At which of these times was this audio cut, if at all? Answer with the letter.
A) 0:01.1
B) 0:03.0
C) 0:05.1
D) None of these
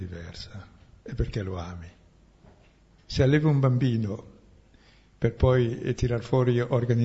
B